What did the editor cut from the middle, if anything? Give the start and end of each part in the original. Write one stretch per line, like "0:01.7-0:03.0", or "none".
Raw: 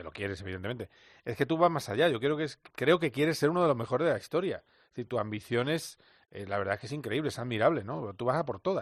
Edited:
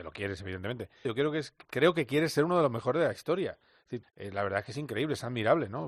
0:01.0-0:02.1
0:05.1-0:06.2